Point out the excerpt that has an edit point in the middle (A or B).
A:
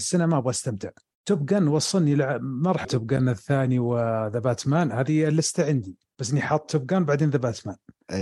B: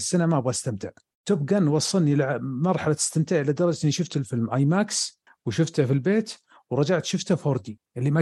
A